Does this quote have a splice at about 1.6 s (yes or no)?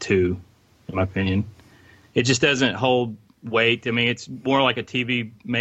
no